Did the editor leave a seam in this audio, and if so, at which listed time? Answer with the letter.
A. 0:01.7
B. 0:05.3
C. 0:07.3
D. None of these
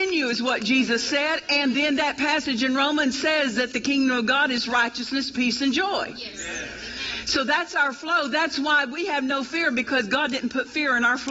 D